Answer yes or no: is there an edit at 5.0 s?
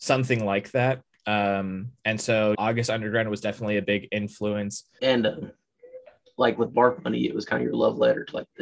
yes